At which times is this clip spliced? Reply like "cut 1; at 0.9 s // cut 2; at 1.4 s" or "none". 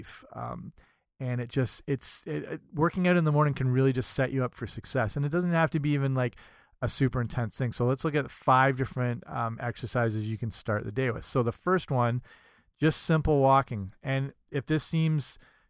none